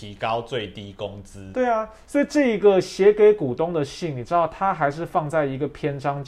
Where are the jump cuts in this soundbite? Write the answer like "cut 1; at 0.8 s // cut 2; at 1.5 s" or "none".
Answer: cut 1; at 1.5 s